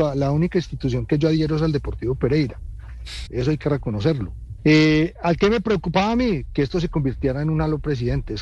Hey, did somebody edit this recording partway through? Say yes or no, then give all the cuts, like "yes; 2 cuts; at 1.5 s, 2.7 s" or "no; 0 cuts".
yes; 2 cuts; at 3.3 s, 4.6 s